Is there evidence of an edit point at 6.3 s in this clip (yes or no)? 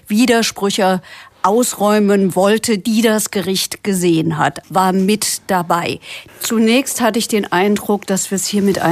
yes